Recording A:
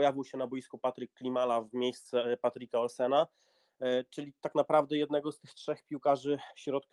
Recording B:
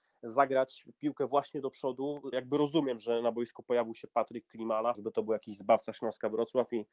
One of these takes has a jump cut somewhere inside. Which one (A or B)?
B